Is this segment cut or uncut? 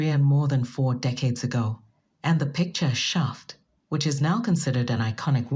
uncut